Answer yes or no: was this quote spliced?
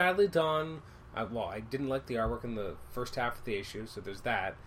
no